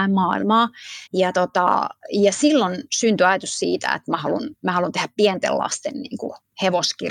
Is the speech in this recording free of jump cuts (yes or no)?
no